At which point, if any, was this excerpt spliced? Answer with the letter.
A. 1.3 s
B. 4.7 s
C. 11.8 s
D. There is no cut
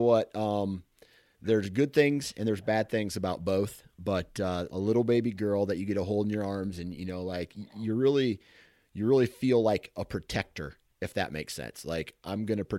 B